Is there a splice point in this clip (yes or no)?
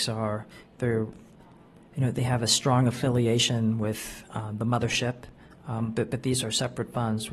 yes